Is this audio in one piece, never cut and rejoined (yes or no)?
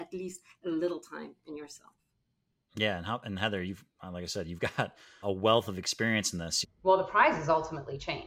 no